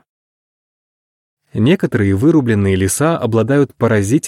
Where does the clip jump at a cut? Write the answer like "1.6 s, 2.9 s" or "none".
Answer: none